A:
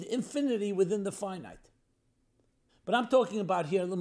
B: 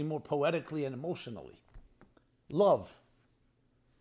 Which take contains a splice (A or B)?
A